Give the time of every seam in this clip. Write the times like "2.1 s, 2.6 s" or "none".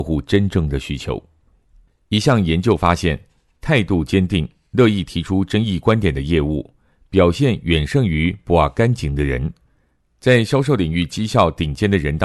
none